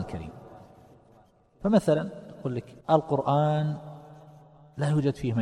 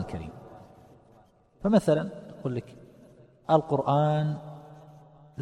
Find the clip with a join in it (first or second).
first